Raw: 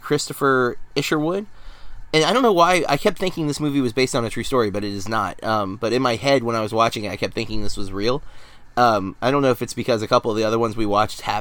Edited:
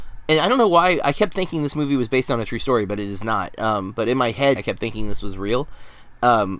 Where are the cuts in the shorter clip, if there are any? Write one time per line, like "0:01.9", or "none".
0:04.6

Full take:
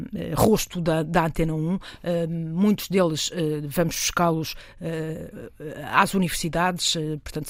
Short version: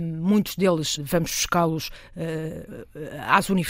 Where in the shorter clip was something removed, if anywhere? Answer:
0:01.0

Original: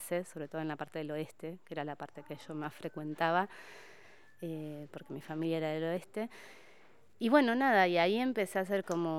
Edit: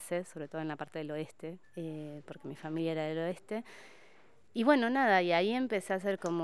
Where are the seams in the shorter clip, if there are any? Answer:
0:01.6

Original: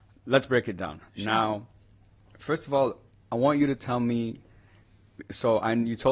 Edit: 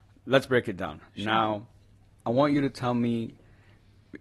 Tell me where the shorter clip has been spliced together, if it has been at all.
0:02.2

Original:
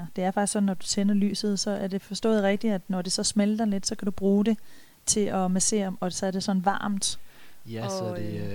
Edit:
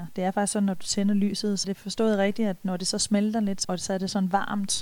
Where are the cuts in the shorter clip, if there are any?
0:01.6
0:03.6

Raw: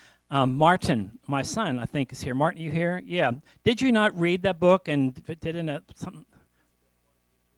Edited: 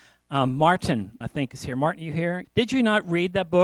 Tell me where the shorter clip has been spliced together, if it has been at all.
0:01.2
0:02.4

